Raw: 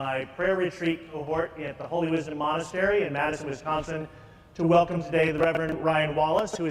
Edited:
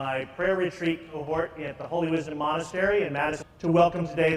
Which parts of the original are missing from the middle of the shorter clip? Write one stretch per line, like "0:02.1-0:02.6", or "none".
0:03.4-0:04.4